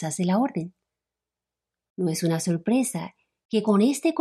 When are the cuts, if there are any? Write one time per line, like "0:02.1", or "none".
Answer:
none